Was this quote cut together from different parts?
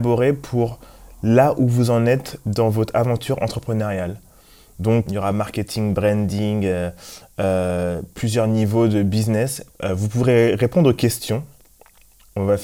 yes; 2 cuts; at 5.1 s, 9.7 s

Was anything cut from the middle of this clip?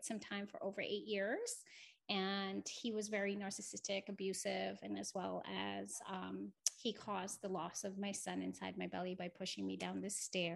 no; 0 cuts

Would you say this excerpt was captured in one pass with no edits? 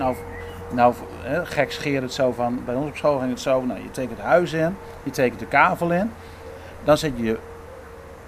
yes; 0 cuts

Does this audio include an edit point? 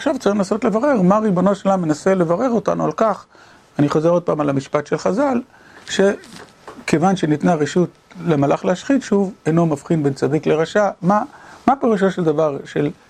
no; 0 cuts

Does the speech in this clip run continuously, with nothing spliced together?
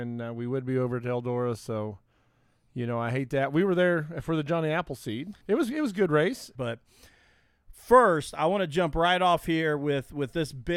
no; 2 cuts; at 5.4 s, 6.5 s

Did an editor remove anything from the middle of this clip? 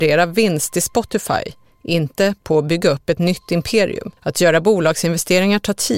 yes; 1 cut; at 4.2 s

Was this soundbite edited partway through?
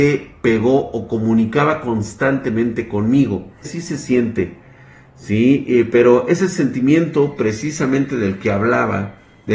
yes; 1 cut; at 3.6 s

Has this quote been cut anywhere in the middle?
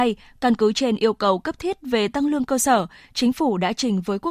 no; 0 cuts

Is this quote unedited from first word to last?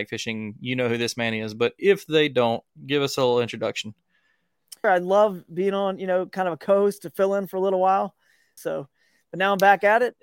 no; 2 cuts; at 4.8 s, 8.6 s

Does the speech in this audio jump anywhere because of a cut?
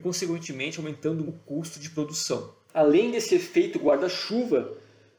yes; 2 cuts; at 1.2 s, 2.7 s

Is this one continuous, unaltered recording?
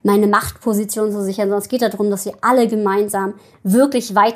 yes; 0 cuts

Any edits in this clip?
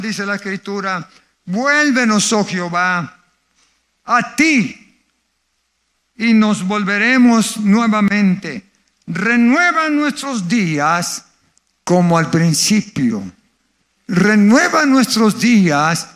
no; 0 cuts

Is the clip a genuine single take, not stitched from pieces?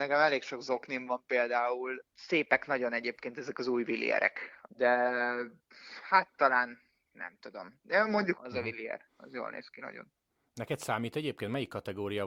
no; 3 cuts; at 2.0 s, 4.7 s, 8.3 s

